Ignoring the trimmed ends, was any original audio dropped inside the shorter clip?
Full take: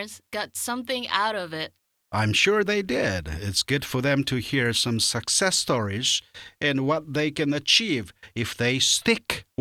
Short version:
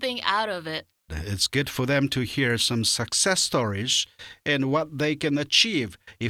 yes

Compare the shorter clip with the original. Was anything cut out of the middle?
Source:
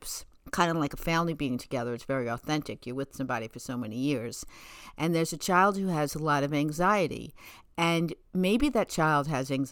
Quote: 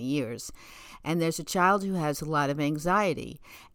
no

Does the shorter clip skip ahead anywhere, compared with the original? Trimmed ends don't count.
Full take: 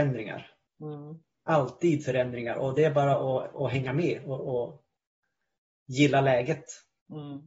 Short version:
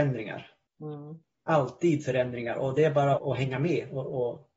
yes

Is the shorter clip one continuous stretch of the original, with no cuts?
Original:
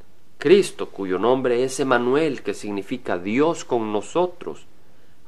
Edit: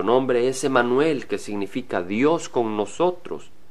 yes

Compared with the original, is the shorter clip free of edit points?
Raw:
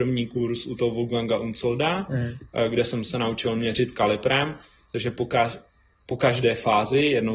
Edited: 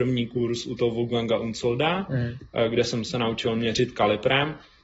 yes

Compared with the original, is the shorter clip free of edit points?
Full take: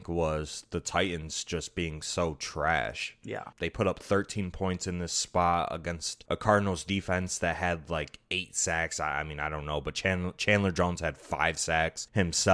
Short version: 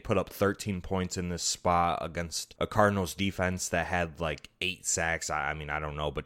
yes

